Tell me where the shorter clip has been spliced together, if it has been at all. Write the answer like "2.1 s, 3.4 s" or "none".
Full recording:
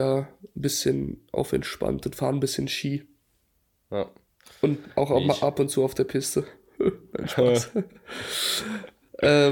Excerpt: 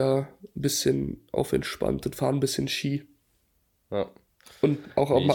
none